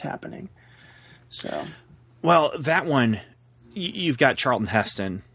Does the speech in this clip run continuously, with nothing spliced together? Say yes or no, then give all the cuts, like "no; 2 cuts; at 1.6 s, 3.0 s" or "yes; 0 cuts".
yes; 0 cuts